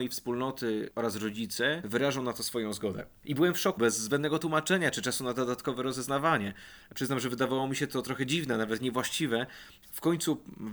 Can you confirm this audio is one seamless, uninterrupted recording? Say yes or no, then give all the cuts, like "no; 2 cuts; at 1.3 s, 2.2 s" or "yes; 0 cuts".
no; 2 cuts; at 3.8 s, 9.8 s